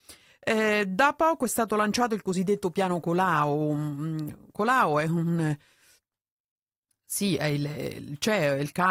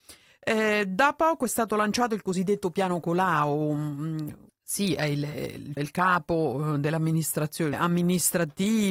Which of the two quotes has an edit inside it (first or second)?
second